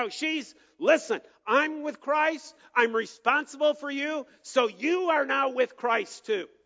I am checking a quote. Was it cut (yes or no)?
no